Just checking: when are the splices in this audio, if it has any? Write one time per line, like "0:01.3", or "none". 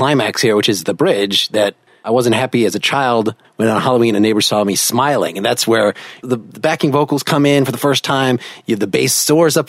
none